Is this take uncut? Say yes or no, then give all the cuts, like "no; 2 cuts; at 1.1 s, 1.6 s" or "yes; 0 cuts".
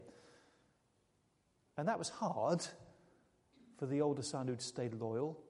yes; 0 cuts